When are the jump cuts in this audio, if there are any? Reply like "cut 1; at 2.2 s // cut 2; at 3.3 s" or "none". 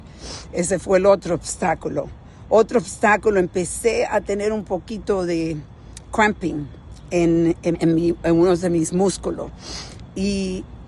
cut 1; at 7.7 s